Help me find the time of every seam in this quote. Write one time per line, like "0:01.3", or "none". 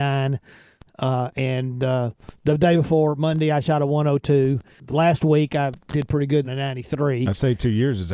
0:06.4